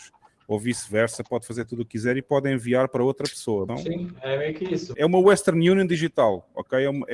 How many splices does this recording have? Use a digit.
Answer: 2